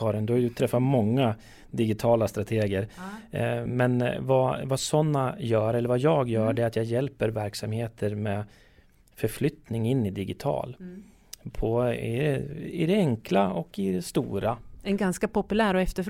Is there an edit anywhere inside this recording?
no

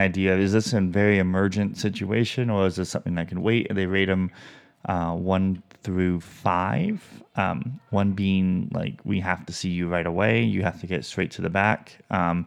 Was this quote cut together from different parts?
no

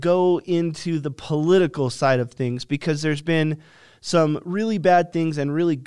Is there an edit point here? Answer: no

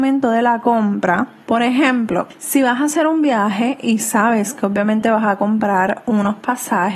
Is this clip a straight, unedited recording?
no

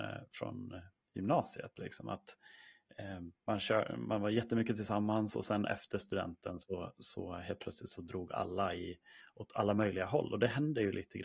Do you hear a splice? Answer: no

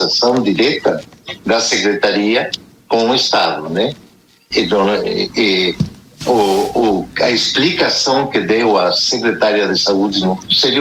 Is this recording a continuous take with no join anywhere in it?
no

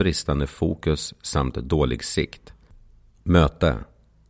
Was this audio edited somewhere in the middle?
yes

